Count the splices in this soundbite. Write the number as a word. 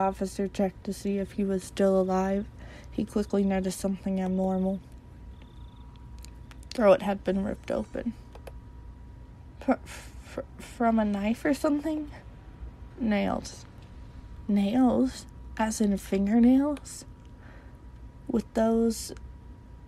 one